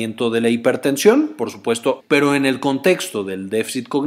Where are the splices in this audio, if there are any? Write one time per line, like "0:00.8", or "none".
0:02.0